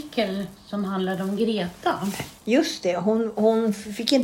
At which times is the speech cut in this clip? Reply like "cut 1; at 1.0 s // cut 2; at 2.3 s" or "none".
none

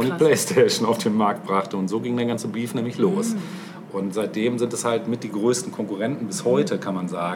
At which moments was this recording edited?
none

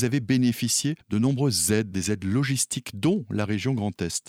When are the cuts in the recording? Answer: cut 1; at 1.9 s

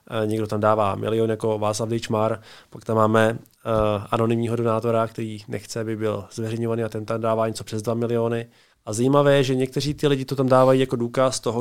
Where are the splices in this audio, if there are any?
cut 1; at 8.7 s

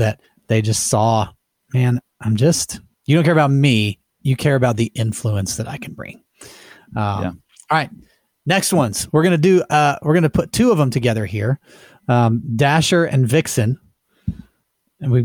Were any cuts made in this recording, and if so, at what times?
none

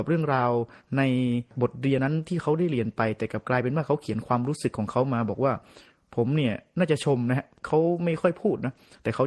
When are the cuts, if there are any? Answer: cut 1; at 2.0 s

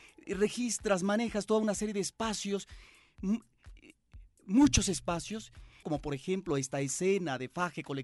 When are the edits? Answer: cut 1; at 5.8 s

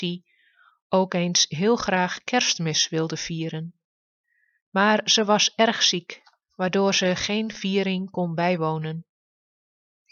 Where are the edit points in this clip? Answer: none

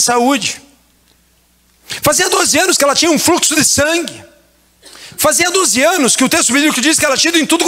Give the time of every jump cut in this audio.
none

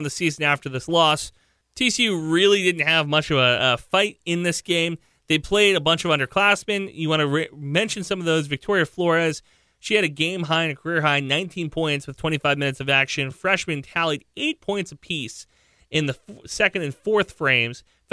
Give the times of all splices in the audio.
none

